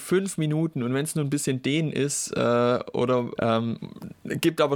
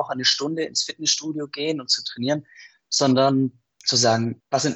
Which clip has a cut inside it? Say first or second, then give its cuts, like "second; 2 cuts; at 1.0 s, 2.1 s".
first; 1 cut; at 3.4 s